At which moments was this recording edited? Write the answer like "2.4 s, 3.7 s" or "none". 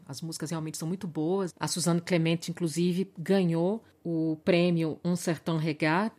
1.5 s